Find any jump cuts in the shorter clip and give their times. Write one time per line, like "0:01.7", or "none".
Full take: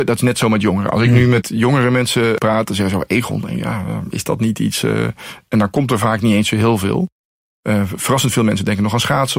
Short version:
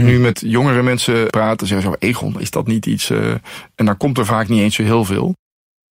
0:02.4